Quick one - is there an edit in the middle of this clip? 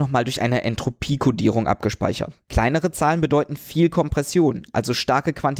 yes; 1 cut; at 2.5 s

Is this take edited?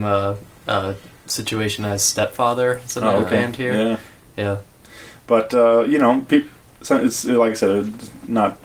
no; 0 cuts

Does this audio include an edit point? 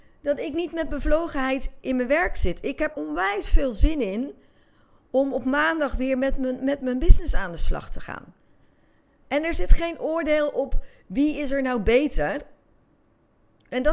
yes; 2 cuts; at 2.9 s, 9.2 s

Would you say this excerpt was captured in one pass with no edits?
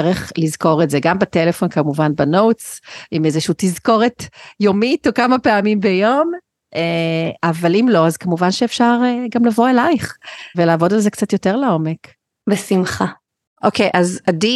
no; 1 cut; at 10.5 s

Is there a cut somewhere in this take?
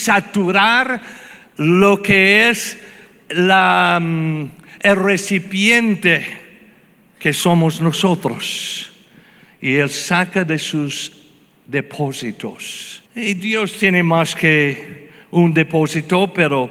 yes; 1 cut; at 13.1 s

